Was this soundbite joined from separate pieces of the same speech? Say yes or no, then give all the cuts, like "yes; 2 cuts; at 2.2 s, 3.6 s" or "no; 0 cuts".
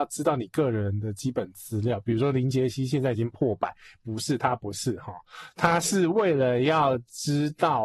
no; 0 cuts